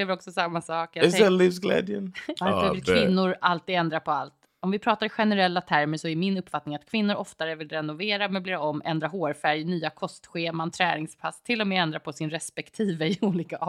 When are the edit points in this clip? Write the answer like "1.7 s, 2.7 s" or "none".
2.4 s